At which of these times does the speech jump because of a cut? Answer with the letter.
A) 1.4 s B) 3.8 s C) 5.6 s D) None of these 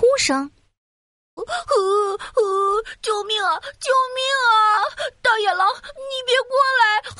A